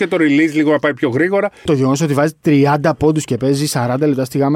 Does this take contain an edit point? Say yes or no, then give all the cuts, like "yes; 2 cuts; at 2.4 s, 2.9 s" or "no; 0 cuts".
yes; 1 cut; at 1.7 s